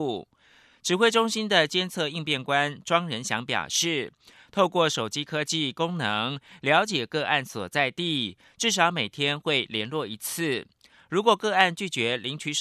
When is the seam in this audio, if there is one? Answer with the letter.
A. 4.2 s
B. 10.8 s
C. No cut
C